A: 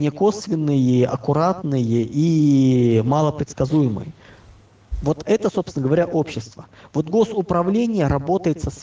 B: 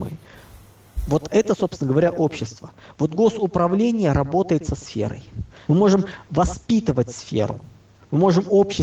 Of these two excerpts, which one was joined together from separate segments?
B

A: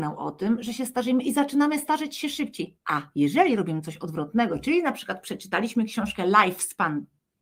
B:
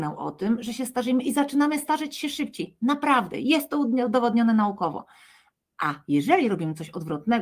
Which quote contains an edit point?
A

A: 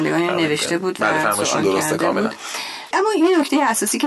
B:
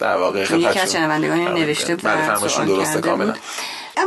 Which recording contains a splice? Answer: B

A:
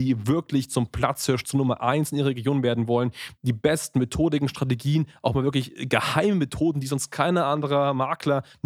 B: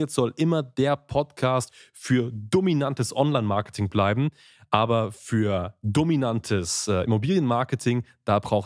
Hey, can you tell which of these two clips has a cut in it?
A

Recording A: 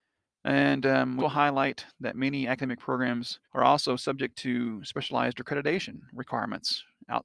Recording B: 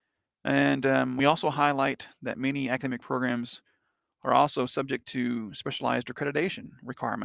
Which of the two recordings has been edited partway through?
A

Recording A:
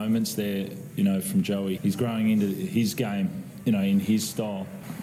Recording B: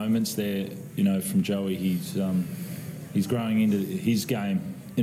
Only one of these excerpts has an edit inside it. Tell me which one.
A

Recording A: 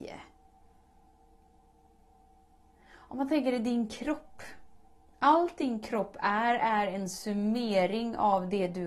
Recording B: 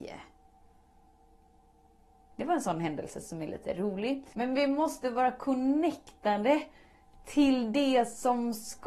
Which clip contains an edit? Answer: B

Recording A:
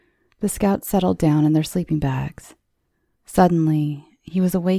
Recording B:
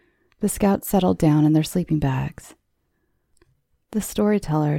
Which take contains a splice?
A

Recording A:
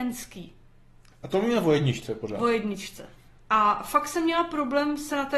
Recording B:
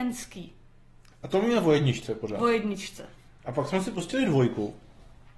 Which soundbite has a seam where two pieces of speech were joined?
A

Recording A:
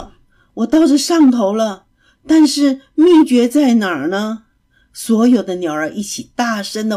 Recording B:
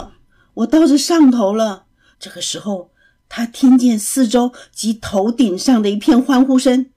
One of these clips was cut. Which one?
B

